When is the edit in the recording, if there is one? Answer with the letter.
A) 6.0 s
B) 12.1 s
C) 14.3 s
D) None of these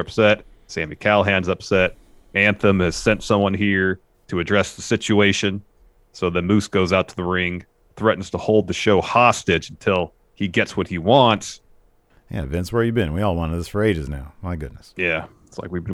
B